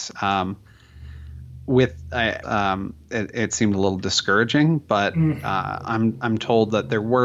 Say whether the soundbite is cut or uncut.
cut